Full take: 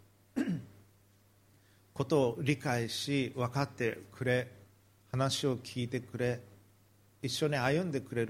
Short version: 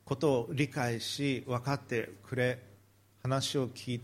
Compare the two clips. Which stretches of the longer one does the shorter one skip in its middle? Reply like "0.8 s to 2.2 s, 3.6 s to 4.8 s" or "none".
none